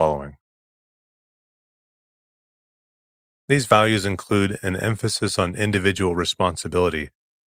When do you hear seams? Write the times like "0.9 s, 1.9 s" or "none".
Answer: 3.3 s